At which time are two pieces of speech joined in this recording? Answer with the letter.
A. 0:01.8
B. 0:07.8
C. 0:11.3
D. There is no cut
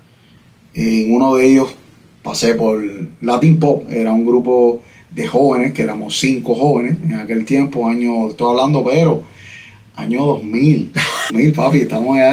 C